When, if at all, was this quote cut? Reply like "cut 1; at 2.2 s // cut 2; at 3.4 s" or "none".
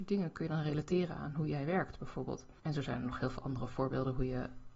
cut 1; at 2.6 s